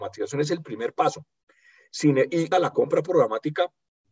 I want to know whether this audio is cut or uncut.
cut